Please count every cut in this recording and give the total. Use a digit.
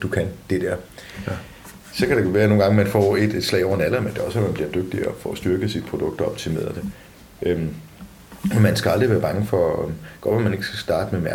0